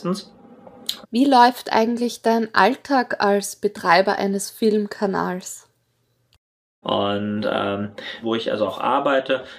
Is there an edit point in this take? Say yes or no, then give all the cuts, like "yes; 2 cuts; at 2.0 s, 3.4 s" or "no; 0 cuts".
yes; 3 cuts; at 1.0 s, 6.8 s, 8.2 s